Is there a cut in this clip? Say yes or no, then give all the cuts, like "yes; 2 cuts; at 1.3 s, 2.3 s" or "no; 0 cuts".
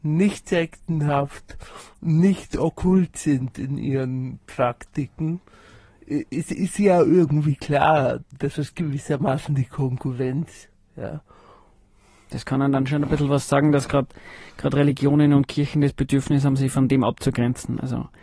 no; 0 cuts